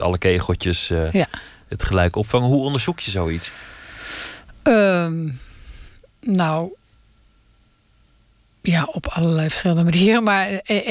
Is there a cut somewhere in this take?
no; 0 cuts

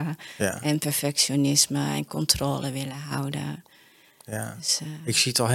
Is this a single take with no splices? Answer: yes; 0 cuts

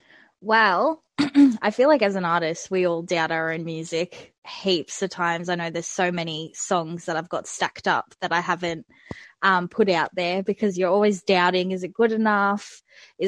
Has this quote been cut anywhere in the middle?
no; 0 cuts

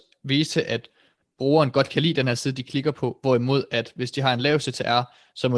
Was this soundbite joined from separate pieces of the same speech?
no; 0 cuts

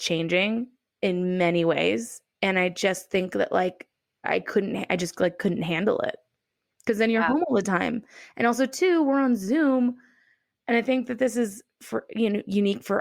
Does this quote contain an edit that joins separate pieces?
no; 0 cuts

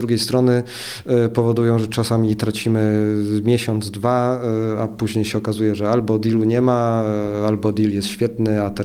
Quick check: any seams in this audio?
no; 0 cuts

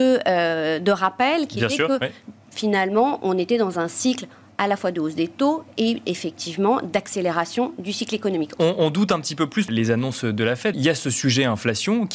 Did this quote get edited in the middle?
yes; 3 cuts; at 8.6 s, 9.7 s, 10.7 s

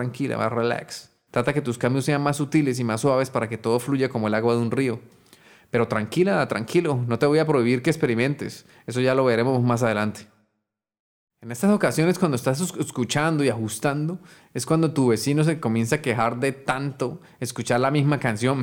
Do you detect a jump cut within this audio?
yes; 1 cut; at 1.3 s

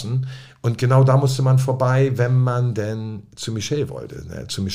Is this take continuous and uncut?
yes; 0 cuts

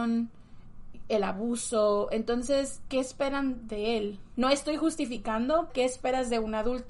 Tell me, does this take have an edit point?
yes; 2 cuts; at 4.3 s, 5.7 s

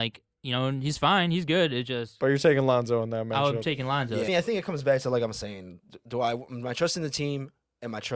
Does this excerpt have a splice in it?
yes; 1 cut; at 4.3 s

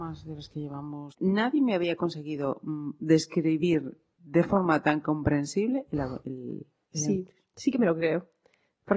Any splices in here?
no; 0 cuts

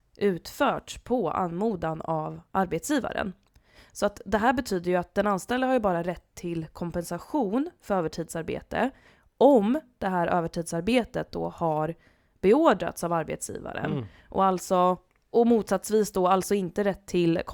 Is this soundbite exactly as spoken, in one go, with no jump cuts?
no; 1 cut; at 15.3 s

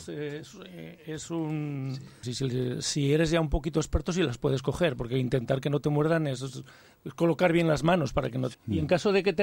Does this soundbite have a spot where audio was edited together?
yes; 2 cuts; at 2.2 s, 8.5 s

